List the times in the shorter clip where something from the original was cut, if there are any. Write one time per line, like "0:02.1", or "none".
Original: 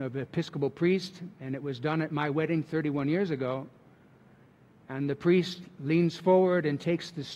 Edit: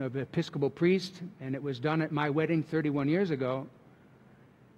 none